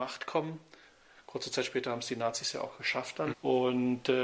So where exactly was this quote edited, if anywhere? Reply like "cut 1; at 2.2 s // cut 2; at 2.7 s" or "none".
cut 1; at 3.3 s